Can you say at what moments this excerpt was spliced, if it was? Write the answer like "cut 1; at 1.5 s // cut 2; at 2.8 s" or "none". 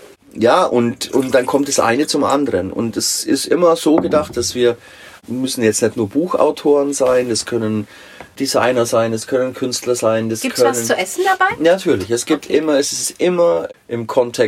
none